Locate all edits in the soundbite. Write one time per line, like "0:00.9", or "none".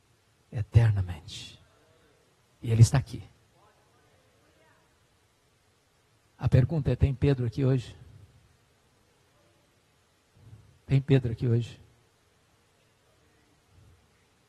none